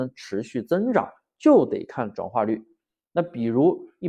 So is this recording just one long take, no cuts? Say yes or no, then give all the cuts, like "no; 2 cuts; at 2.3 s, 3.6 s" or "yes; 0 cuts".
yes; 0 cuts